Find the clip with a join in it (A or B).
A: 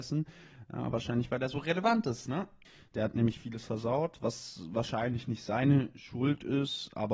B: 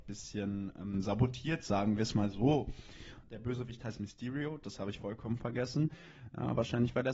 B